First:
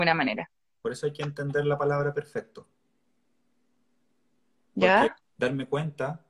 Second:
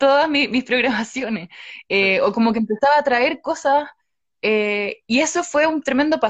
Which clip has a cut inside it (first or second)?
first